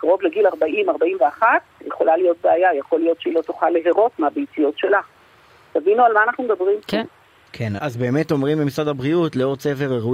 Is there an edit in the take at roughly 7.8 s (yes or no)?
yes